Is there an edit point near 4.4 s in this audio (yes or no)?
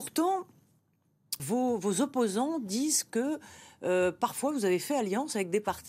no